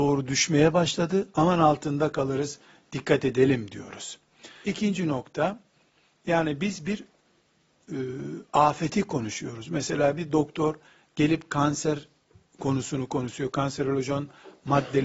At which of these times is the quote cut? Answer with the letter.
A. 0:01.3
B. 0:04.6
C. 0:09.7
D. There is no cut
B